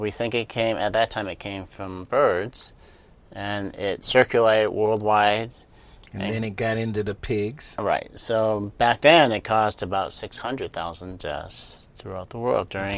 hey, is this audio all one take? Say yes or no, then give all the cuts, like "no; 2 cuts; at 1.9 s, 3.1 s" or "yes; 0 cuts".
yes; 0 cuts